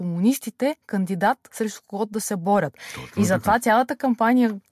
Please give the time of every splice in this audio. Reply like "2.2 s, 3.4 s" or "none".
none